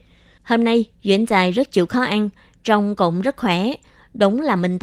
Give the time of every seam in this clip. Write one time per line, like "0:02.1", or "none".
none